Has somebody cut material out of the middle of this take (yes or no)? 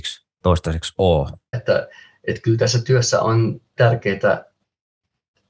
yes